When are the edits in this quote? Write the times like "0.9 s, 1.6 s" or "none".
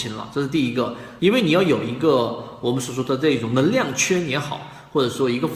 1.2 s